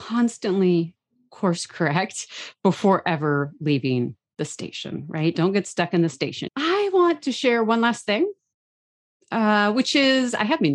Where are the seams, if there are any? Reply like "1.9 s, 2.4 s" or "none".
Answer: 6.5 s